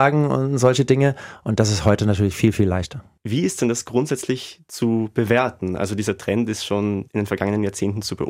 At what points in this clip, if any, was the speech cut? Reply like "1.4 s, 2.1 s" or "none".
none